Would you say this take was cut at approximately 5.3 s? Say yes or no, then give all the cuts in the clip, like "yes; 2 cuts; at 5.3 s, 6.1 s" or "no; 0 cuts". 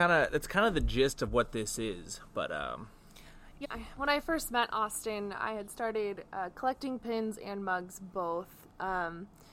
no; 1 cut; at 3.6 s